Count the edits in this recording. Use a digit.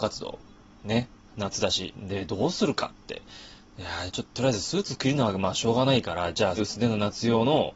3